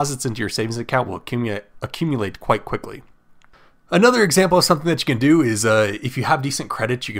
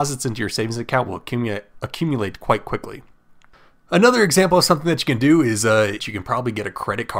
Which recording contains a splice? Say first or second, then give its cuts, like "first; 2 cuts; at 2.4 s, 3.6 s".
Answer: second; 1 cut; at 6.0 s